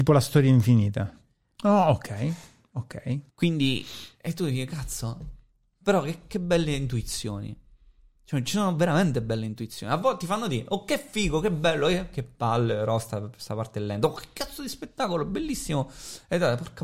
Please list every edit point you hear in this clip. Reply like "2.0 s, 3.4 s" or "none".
1.6 s, 3.3 s